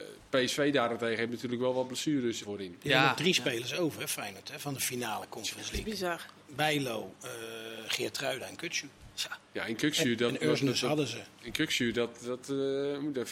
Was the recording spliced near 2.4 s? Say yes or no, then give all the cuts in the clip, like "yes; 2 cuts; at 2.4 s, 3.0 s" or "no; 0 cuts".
yes; 1 cut; at 2.4 s